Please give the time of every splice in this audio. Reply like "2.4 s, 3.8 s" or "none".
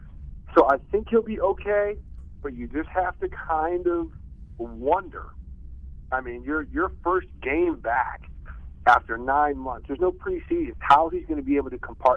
10.7 s